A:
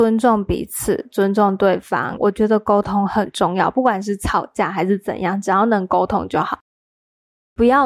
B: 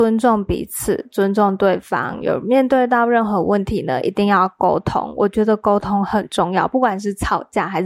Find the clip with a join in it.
A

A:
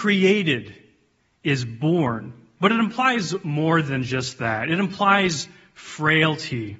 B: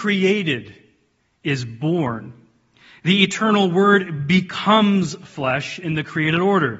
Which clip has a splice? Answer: A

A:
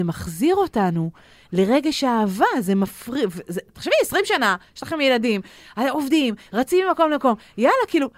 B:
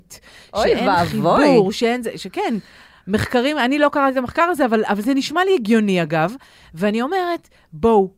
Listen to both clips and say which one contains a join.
B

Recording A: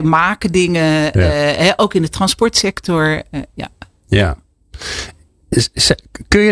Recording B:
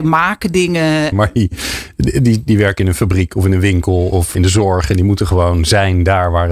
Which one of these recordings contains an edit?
B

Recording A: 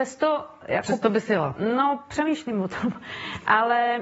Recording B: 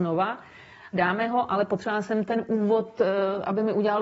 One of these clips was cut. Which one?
B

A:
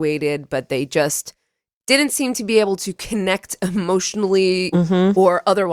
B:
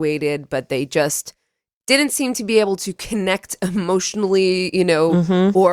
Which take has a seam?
A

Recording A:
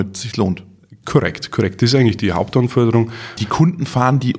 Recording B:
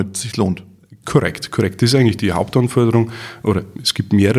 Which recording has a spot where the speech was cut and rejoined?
A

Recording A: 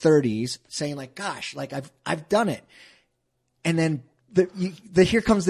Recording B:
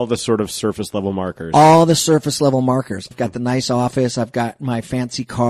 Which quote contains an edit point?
B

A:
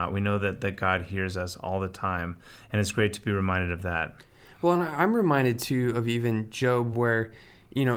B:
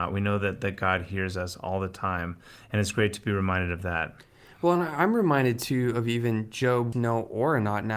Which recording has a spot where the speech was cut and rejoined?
B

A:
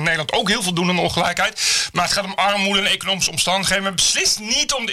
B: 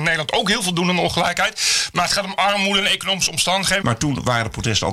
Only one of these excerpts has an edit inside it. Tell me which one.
B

